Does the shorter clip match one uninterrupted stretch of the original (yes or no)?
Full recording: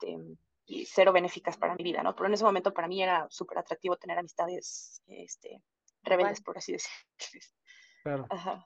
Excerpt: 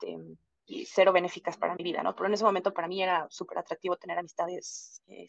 yes